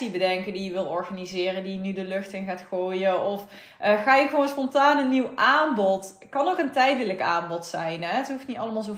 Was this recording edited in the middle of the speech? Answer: no; 0 cuts

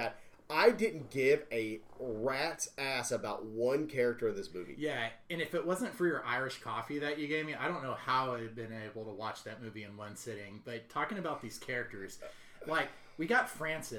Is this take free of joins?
yes; 0 cuts

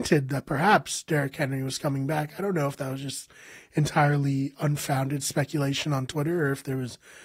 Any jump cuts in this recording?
no; 0 cuts

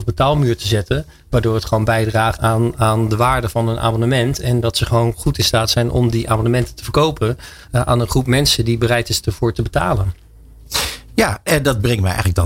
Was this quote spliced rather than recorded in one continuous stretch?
yes; 1 cut; at 2.4 s

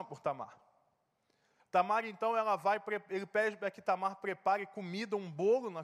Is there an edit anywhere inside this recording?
yes; 1 cut; at 1.6 s

